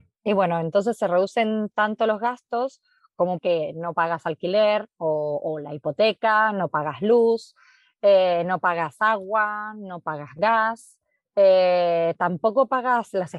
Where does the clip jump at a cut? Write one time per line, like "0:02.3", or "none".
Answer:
0:03.4